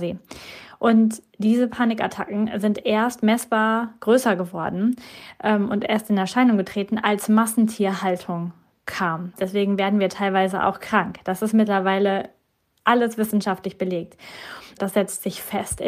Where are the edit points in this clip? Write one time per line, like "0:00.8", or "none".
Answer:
0:09.3
0:14.8